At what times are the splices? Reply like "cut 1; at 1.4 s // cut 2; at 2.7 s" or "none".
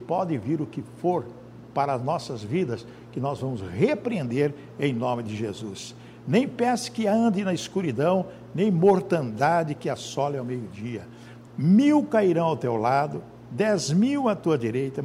cut 1; at 11.5 s